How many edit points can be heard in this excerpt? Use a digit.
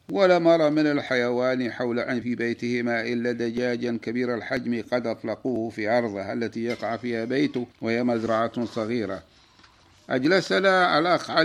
2